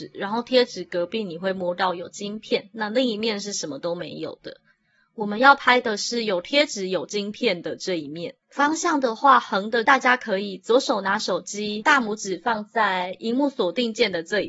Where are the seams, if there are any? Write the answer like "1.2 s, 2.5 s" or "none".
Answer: 8.4 s, 9.9 s